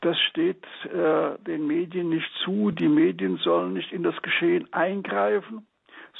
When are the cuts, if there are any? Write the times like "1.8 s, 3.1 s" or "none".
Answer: none